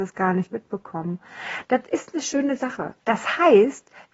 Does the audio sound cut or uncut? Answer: cut